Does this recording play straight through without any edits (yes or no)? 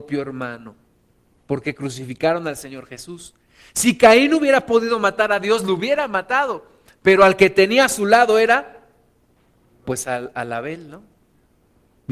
no